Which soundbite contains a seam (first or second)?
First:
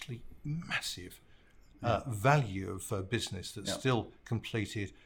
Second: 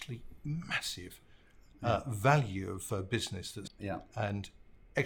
second